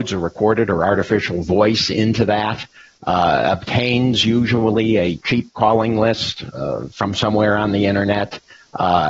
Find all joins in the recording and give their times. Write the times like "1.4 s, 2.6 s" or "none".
none